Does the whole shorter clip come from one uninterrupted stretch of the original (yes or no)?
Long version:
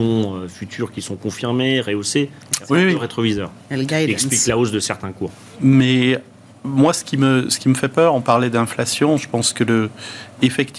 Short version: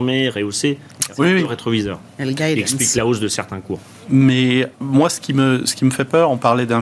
no